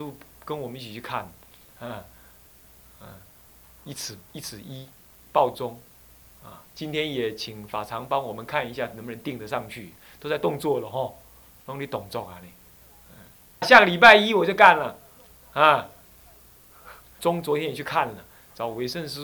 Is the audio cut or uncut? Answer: cut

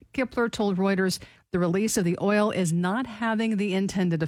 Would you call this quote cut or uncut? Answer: uncut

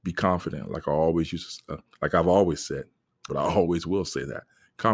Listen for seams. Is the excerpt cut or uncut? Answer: cut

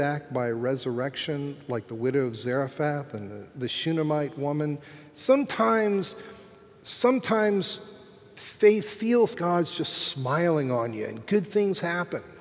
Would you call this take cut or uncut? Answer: cut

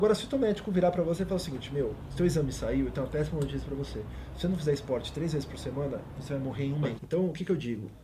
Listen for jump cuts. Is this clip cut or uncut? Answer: cut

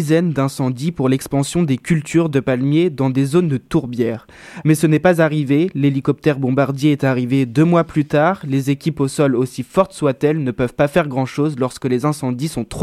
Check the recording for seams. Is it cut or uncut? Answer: cut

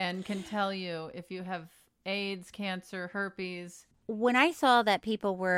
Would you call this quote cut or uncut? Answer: uncut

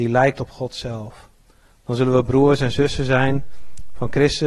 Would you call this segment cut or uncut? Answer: uncut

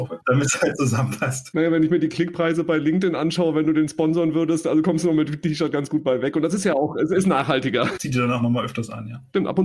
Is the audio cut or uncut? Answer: uncut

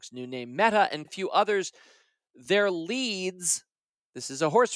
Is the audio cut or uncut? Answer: cut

